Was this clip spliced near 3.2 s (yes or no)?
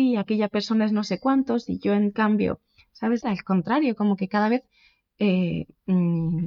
yes